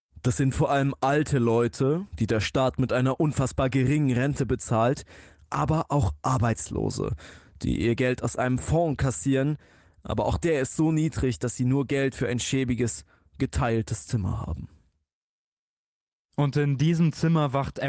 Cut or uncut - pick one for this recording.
uncut